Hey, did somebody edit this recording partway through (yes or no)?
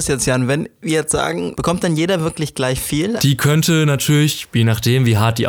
yes